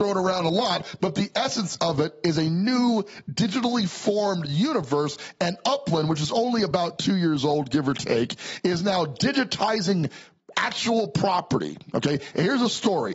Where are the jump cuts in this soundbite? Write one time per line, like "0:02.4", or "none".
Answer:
none